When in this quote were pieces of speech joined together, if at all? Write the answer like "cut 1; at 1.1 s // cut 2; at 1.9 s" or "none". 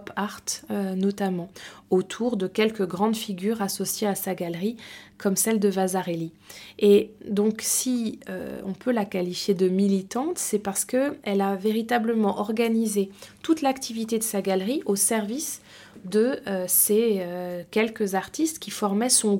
none